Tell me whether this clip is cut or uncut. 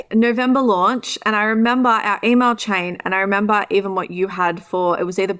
uncut